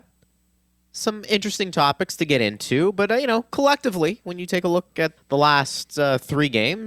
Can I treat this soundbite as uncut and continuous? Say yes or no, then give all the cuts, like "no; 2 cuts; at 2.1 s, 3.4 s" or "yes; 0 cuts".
no; 1 cut; at 5.2 s